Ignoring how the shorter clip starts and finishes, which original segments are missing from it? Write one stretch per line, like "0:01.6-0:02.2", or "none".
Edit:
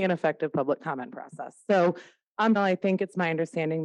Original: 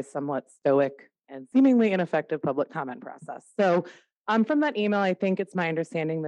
0:04.4-0:04.9